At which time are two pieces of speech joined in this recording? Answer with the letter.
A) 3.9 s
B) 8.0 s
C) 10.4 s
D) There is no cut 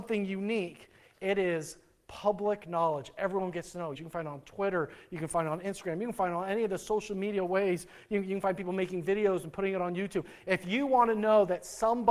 A